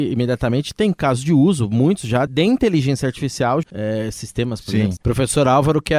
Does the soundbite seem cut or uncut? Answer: cut